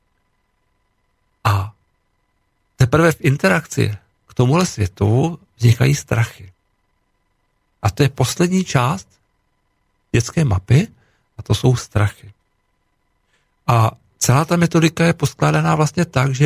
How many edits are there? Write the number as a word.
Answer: one